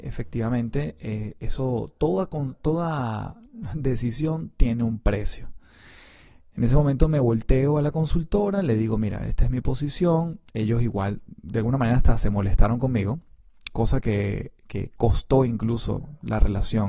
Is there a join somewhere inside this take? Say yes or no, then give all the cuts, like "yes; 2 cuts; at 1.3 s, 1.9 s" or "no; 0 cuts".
no; 0 cuts